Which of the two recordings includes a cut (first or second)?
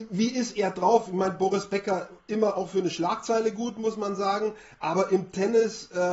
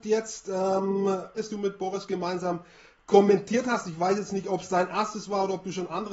second